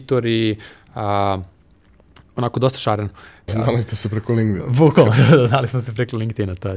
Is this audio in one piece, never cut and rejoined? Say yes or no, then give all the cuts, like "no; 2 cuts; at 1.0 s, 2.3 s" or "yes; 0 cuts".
no; 1 cut; at 3.5 s